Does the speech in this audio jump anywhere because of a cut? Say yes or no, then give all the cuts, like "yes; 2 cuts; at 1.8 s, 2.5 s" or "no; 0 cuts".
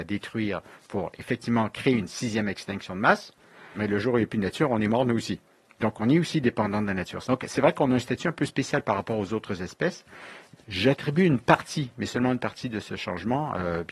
yes; 3 cuts; at 3.7 s, 7.2 s, 10.6 s